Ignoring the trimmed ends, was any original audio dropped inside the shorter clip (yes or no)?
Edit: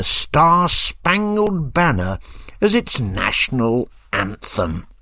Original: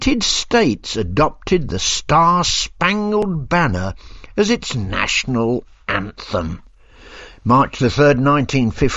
no